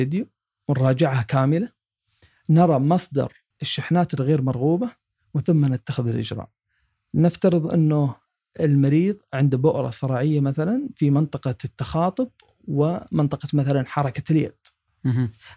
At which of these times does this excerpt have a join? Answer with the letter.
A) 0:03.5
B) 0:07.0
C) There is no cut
A